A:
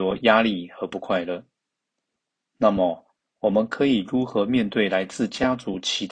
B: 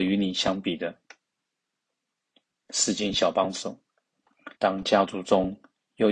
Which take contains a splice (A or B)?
B